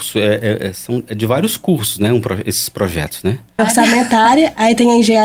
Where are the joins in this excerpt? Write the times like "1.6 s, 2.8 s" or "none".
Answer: 3.6 s